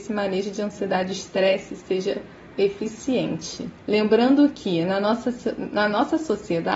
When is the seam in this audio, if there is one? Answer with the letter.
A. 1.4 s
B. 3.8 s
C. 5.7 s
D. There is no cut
B